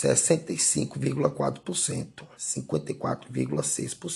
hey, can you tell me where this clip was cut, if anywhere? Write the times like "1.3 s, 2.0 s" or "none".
2.3 s